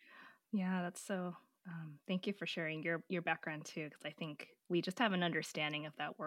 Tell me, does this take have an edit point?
no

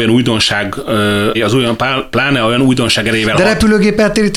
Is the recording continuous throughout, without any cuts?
no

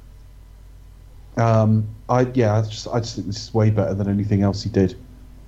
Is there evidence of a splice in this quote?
no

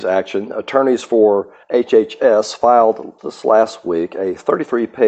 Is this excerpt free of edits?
no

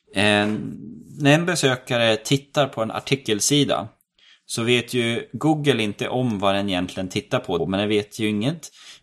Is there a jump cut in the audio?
yes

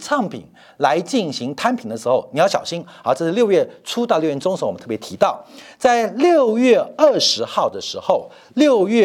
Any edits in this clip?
no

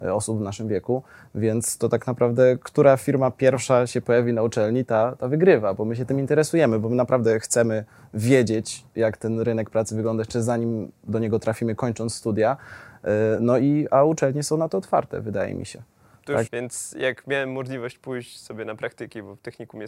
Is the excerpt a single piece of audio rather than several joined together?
no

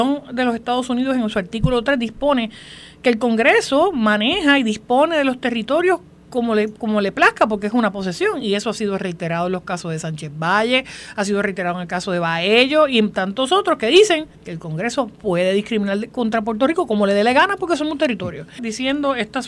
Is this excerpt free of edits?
no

